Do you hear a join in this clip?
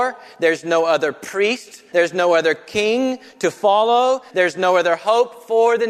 yes; 2 cuts; at 1.9 s, 4.3 s

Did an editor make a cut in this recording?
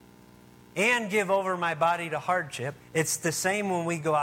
yes; 1 cut; at 2.8 s

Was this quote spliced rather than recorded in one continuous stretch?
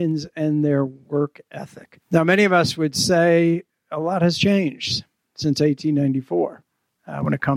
yes; 1 cut; at 2.0 s

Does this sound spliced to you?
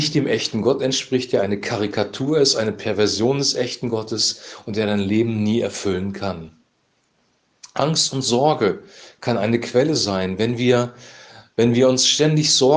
no; 0 cuts

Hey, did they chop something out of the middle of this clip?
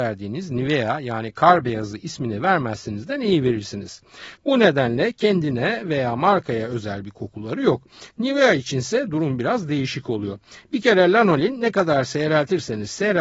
yes; 1 cut; at 4.4 s

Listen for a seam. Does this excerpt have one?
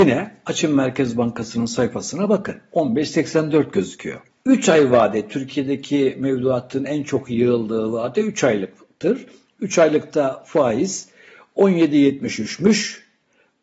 no; 0 cuts

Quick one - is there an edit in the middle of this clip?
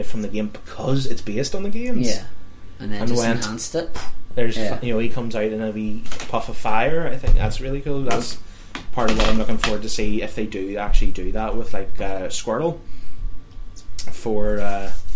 no; 0 cuts

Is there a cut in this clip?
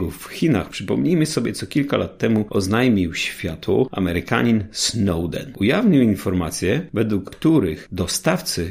no; 0 cuts

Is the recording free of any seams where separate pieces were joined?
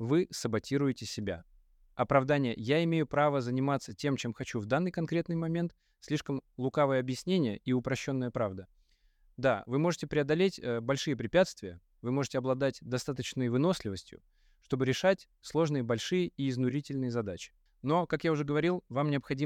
yes; 0 cuts

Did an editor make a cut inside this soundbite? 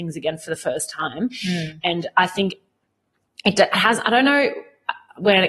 no; 0 cuts

